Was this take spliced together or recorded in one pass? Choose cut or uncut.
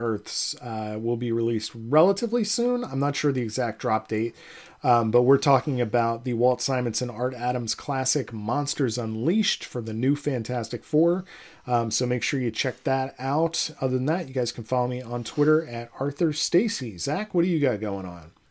uncut